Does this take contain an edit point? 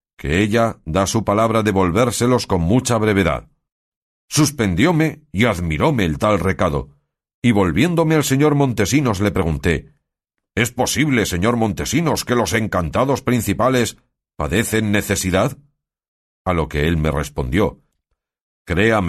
no; 0 cuts

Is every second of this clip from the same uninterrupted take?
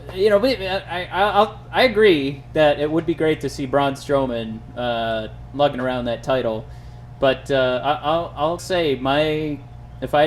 no; 1 cut; at 8.6 s

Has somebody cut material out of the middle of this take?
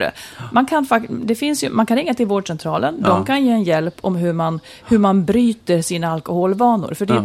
no; 0 cuts

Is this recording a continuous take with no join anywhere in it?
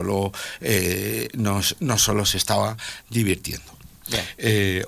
yes; 0 cuts

